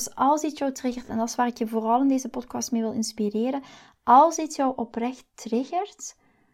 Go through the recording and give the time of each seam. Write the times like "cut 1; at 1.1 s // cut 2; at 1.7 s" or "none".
none